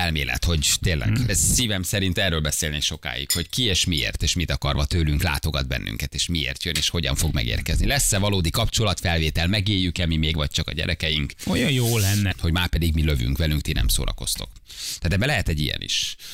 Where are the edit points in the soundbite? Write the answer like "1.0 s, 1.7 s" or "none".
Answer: 1.3 s, 12.3 s